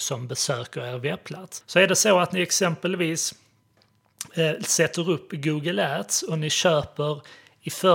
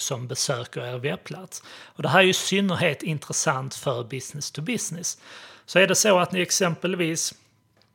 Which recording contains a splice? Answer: first; 1 cut; at 1.6 s

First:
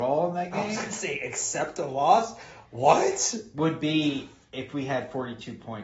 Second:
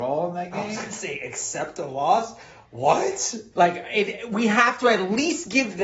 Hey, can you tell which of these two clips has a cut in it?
second; 1 cut; at 3.5 s

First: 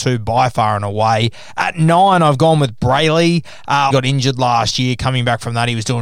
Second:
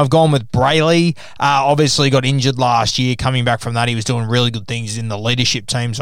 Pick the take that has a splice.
first; 1 cut; at 3.9 s

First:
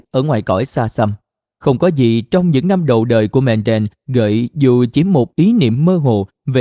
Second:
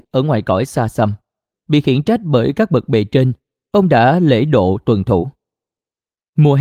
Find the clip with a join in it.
second; 1 cut; at 1.5 s

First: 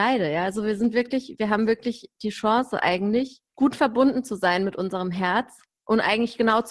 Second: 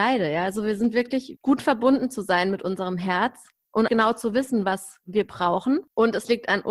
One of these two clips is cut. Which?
second; 2 cuts; at 1.4 s, 3.9 s

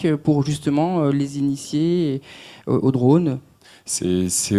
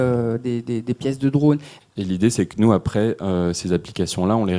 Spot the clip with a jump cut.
second; 1 cut; at 1.8 s

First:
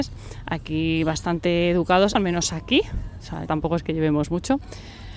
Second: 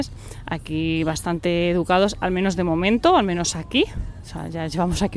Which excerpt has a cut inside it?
first; 2 cuts; at 2.2 s, 3.5 s

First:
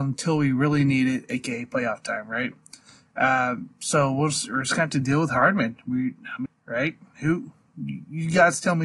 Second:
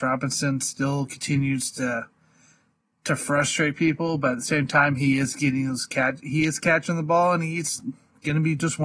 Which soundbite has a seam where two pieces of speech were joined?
first; 1 cut; at 6.5 s

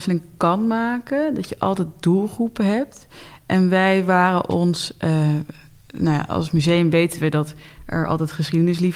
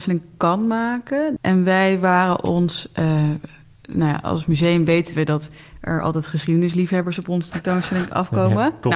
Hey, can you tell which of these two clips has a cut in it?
second; 1 cut; at 1.4 s

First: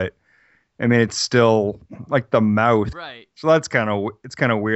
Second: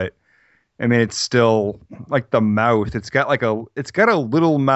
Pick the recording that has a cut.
first; 1 cut; at 2.9 s

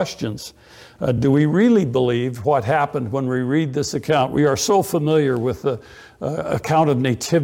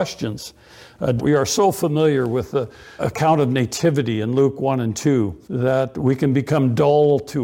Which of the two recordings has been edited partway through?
second; 3 cuts; at 1.2 s, 3.0 s, 5.4 s

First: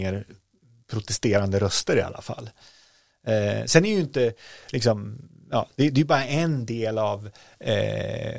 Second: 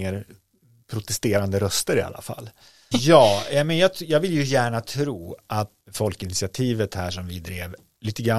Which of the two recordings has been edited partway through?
second; 2 cuts; at 2.9 s, 5.8 s

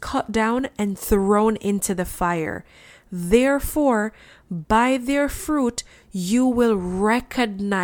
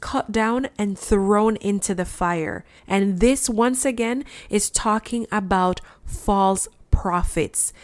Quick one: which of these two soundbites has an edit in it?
second; 1 cut; at 2.8 s

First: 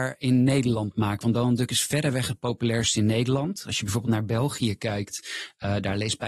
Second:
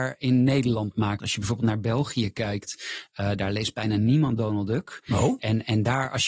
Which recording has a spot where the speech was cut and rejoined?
second; 1 cut; at 1.2 s

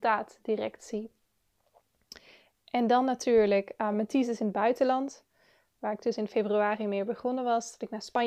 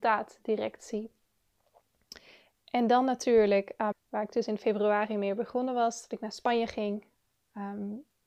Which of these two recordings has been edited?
second; 1 cut; at 3.9 s

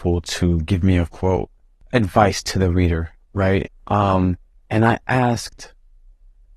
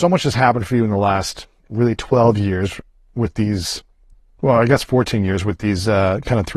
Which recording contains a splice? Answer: first; 1 cut; at 3.7 s

